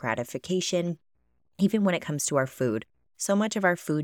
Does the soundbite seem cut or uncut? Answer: uncut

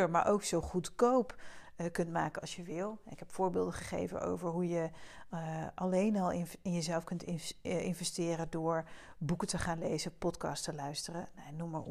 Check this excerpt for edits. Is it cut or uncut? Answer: uncut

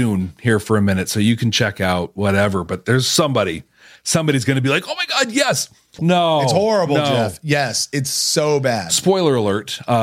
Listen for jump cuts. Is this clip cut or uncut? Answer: cut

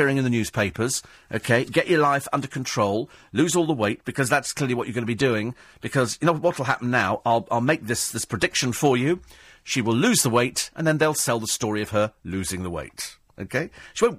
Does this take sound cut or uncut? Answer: cut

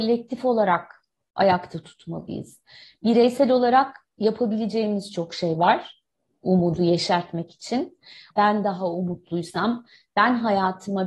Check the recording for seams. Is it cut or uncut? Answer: cut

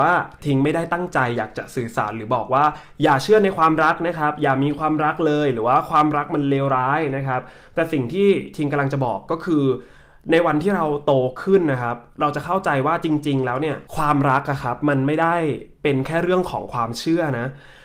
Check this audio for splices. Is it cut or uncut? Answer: cut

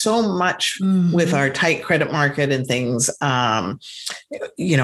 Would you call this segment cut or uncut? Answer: uncut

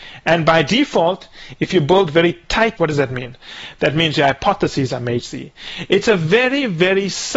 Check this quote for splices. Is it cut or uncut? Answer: cut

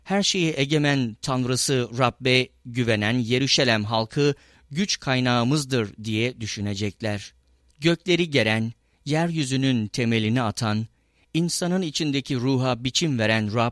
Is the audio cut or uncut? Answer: cut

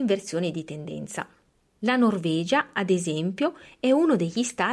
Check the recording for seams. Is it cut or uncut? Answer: uncut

